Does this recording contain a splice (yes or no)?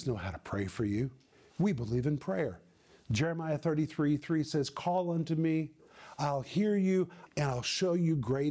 yes